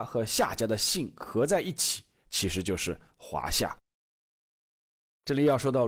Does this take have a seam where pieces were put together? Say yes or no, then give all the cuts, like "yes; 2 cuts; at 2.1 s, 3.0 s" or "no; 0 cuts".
no; 0 cuts